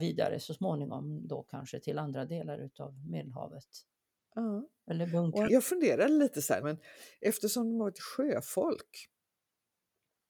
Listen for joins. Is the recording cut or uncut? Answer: cut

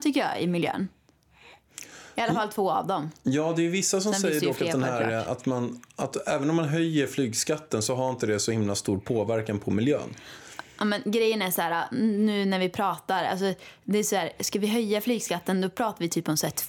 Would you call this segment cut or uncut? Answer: uncut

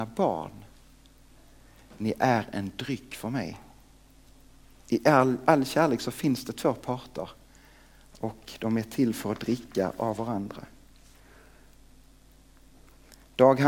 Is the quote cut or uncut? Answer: uncut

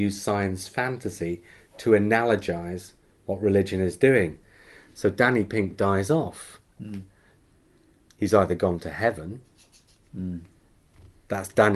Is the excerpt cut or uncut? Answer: cut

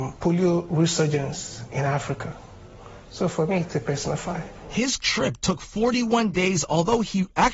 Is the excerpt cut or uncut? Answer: uncut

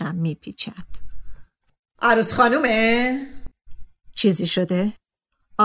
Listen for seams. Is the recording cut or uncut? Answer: cut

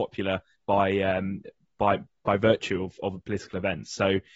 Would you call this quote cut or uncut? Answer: uncut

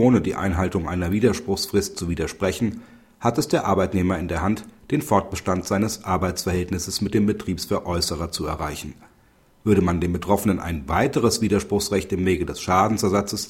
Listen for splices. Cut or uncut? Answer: uncut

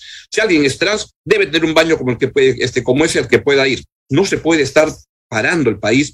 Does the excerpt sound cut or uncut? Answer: uncut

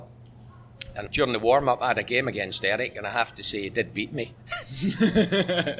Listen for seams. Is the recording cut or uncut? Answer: cut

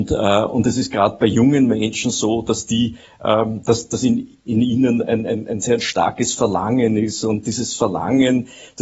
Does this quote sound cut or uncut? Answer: uncut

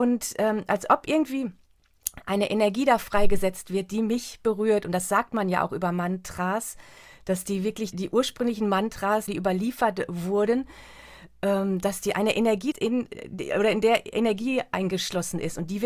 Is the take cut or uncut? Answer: cut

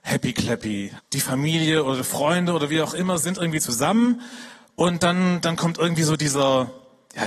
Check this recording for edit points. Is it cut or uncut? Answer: cut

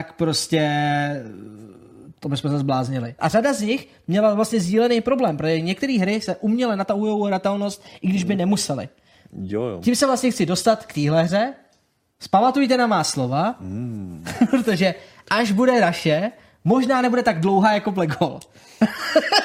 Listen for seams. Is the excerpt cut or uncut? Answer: cut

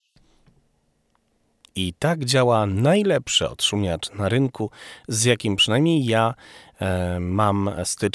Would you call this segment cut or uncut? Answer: uncut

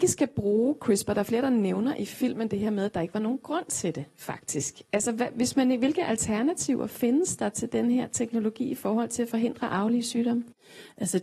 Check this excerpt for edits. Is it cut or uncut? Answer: uncut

